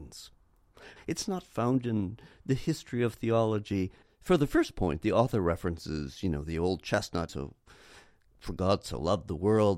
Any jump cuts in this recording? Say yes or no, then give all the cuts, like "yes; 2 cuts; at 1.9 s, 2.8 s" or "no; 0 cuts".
yes; 3 cuts; at 1.0 s, 4.0 s, 7.3 s